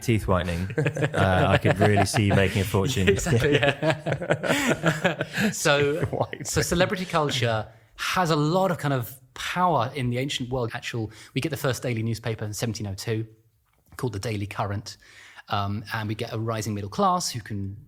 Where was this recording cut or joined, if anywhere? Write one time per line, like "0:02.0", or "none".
0:10.7

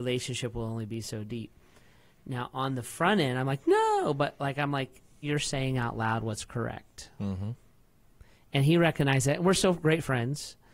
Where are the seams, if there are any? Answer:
0:05.2

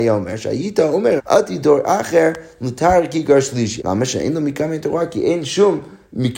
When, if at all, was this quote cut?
0:01.2
0:03.8

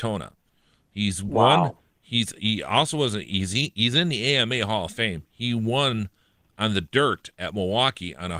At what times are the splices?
none

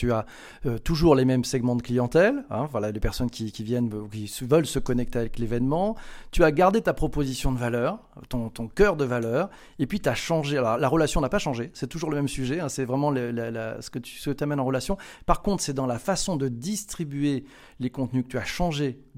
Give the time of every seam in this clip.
none

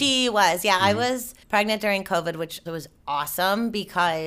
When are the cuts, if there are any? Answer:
0:01.4
0:02.7

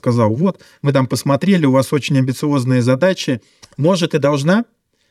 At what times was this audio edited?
0:03.6

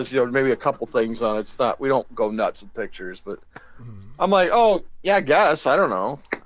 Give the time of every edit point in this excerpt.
none

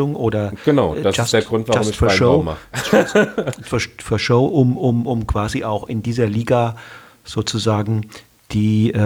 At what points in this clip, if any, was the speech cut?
0:03.6

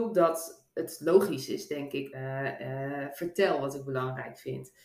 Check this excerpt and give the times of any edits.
0:02.1

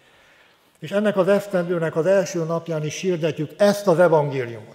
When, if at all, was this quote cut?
none

